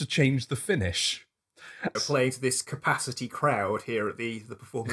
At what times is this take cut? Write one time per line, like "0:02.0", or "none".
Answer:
0:01.9